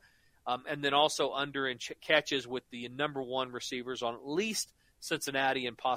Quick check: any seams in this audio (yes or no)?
no